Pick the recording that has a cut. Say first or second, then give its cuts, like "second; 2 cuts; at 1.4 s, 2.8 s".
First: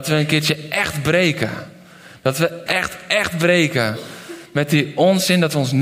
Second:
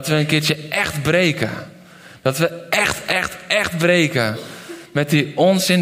first; 1 cut; at 2.7 s